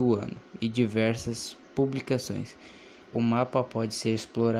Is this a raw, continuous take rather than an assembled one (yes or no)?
no